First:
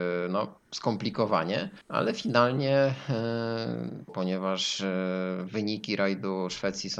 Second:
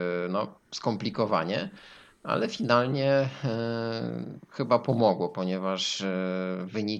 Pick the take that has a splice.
first; 2 cuts; at 1.8 s, 4.1 s

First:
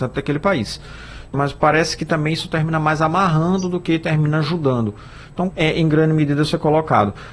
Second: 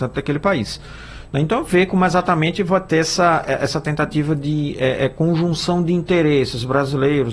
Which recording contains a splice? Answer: first; 2 cuts; at 1.3 s, 5.5 s

